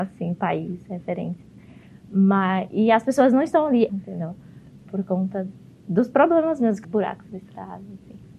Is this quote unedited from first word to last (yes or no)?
no